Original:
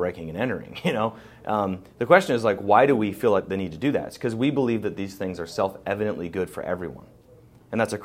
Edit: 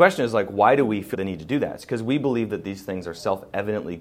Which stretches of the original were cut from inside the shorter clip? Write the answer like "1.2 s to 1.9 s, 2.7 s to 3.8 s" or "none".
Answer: 3.2 s to 3.5 s